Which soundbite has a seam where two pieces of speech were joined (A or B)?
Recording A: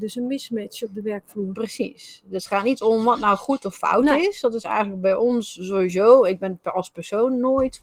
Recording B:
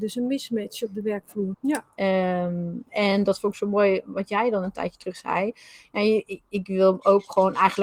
B